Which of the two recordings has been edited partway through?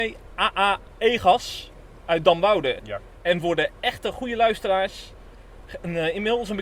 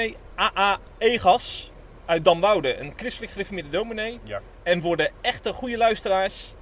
first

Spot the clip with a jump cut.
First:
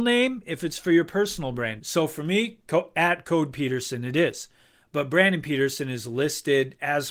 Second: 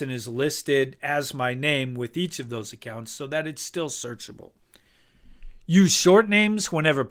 first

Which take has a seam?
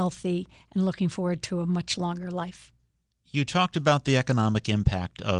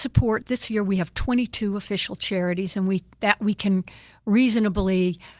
second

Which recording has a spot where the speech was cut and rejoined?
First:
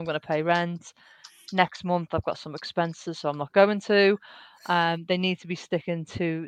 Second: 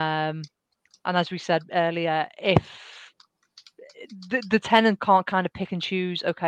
second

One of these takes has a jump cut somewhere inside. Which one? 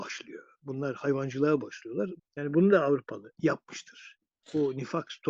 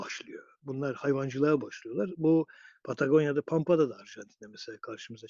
first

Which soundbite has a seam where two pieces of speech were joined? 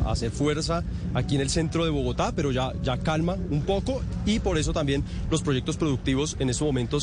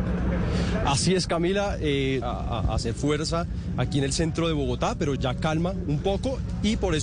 second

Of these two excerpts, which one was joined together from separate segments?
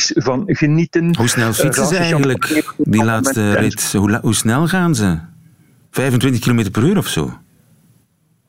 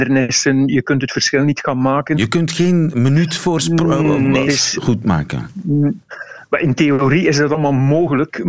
second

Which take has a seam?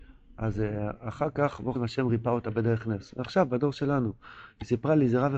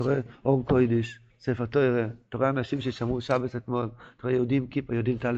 first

